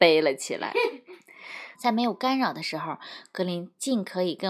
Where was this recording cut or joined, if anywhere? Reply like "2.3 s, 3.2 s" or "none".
1.7 s